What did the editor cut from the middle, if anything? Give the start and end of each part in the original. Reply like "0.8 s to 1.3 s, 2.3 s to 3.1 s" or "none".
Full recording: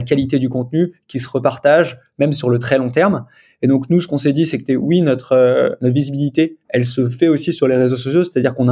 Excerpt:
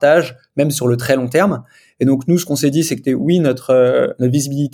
none